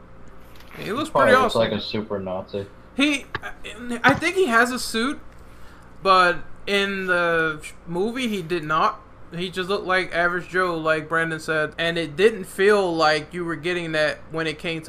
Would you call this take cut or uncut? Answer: cut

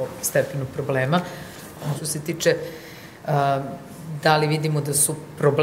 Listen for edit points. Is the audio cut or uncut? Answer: cut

